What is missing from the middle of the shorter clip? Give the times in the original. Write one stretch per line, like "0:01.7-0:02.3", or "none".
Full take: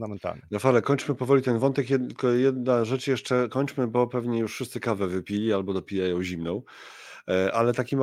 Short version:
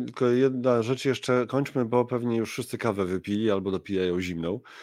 none